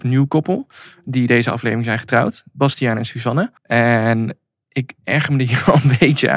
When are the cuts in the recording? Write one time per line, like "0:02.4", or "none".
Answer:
0:03.6